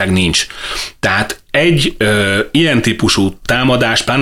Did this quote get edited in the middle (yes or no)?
no